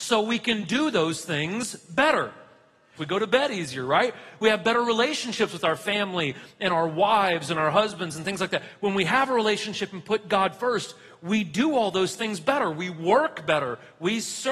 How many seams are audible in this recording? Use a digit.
1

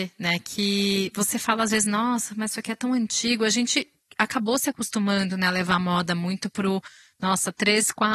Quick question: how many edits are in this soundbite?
0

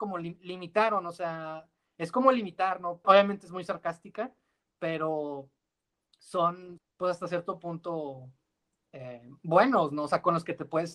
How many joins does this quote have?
2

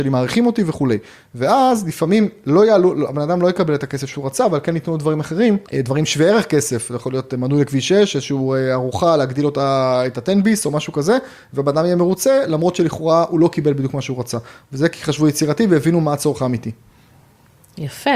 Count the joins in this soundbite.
1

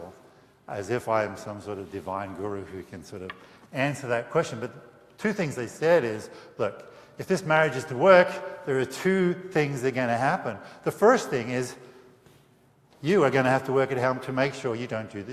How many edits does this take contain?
0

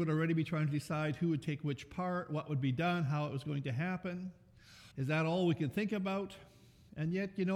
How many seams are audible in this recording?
1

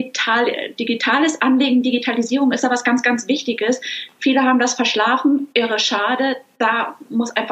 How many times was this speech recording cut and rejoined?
0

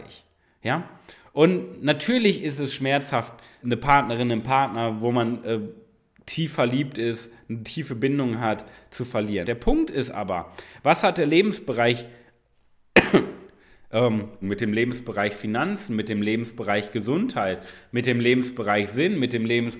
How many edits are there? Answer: 3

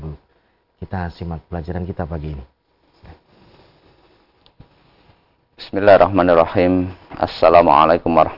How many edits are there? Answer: 0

